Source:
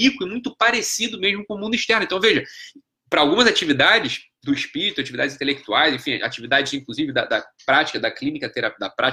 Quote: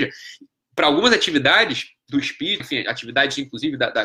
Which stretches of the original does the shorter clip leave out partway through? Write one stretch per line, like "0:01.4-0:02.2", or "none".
0:04.9-0:06.0